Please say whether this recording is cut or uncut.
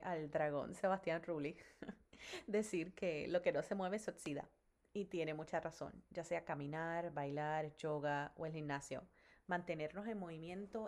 uncut